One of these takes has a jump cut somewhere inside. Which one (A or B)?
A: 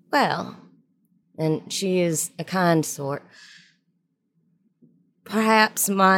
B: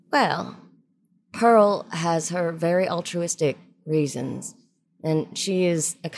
A